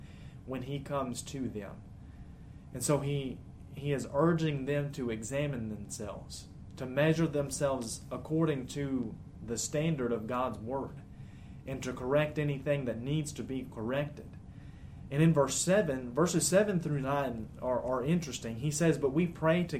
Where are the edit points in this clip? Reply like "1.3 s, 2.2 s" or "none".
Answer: 15.1 s